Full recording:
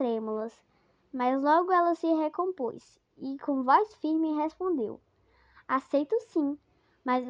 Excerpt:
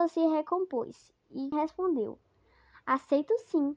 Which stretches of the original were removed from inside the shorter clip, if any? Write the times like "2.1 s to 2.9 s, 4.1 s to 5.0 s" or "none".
3.4 s to 4.3 s